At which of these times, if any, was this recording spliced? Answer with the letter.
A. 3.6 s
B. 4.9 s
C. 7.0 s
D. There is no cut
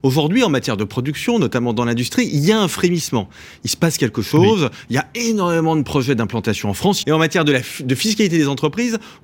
C